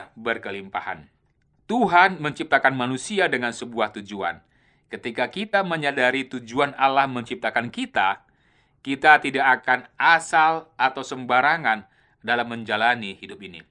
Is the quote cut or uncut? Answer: cut